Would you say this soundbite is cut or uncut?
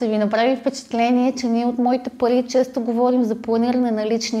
uncut